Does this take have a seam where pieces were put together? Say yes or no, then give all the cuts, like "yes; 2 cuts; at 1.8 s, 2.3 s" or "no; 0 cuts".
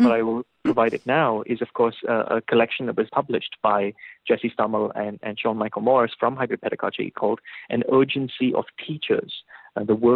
yes; 1 cut; at 3.1 s